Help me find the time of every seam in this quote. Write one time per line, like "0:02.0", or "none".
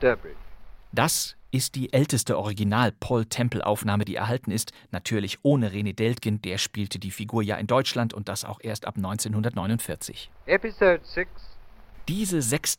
none